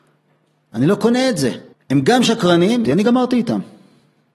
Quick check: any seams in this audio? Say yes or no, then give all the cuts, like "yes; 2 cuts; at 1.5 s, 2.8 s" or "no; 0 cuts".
yes; 2 cuts; at 1.7 s, 2.8 s